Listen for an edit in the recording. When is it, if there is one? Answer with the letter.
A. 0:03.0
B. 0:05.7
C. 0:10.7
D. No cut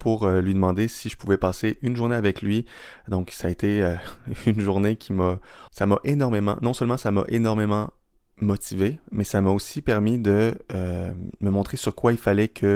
B